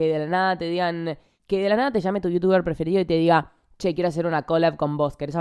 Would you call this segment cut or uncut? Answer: uncut